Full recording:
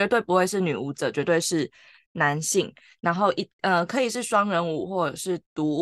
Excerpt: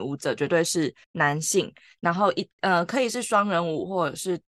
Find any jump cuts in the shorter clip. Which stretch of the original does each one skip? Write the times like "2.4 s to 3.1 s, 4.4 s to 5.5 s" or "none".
1.8 s to 2.0 s